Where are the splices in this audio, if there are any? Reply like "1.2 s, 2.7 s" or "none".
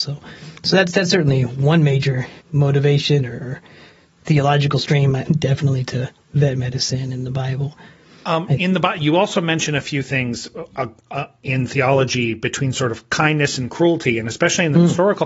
2.4 s, 5.3 s